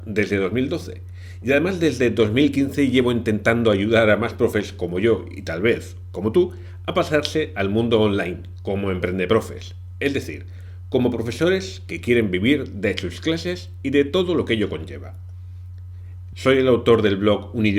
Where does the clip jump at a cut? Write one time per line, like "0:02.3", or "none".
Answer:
0:16.3